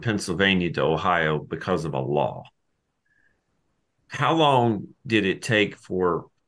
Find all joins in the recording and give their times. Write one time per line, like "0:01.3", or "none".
none

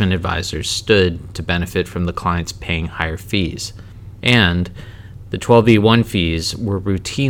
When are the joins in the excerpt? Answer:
0:04.2

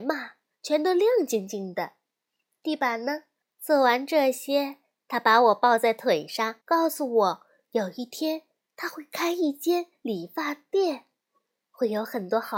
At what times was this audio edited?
0:03.4
0:06.6

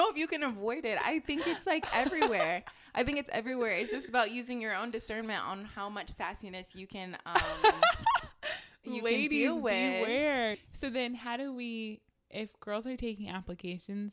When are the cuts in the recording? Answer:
0:10.5

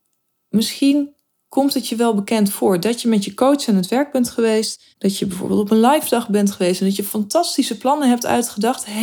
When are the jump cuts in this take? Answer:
0:04.9

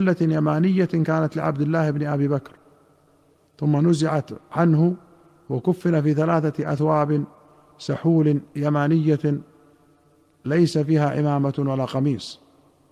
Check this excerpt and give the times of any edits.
none

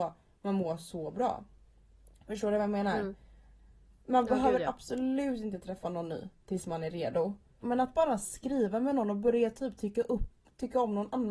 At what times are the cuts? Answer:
0:07.6

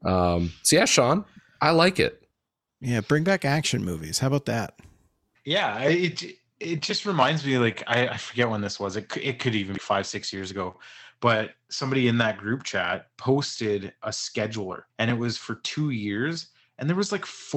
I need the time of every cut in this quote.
0:09.8
0:14.9

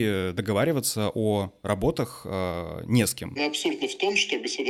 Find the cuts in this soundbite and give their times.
0:03.4

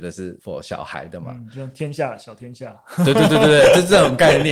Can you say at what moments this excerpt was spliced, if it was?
none

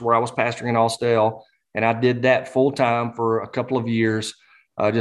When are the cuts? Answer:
none

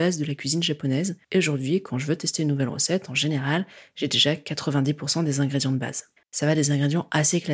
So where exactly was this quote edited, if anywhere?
0:01.2
0:06.2

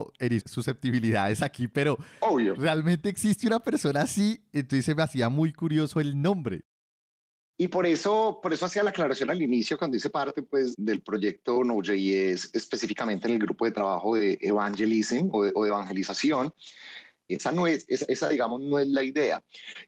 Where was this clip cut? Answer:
0:10.7
0:17.3

